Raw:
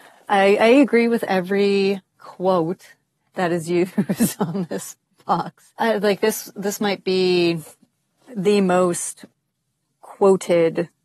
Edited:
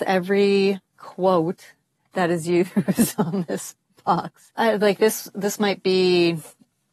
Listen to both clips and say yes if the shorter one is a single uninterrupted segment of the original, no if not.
yes